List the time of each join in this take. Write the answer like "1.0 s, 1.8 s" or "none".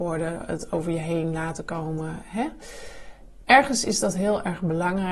none